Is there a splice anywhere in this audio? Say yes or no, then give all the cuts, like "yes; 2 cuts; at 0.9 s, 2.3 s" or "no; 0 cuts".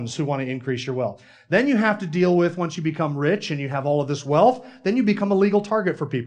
no; 0 cuts